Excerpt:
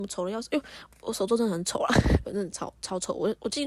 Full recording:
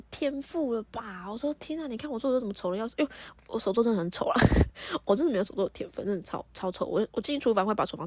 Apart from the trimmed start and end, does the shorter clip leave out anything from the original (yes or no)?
yes